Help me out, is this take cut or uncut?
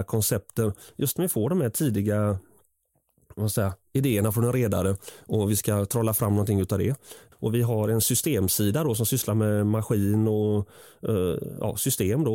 cut